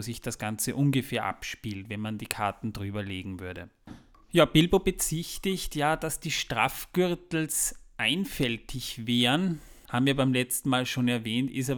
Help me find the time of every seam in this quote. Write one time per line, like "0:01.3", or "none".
0:09.9